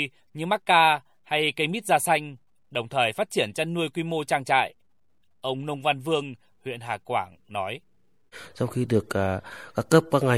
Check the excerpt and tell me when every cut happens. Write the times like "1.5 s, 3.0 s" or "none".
6.5 s